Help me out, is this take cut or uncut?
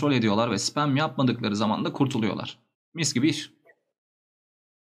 cut